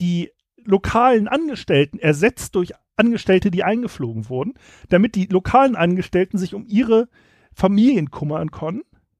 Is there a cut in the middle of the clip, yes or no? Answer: no